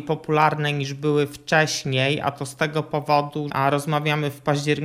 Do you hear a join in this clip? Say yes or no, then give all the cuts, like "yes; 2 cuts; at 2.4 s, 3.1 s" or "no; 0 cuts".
yes; 1 cut; at 3.5 s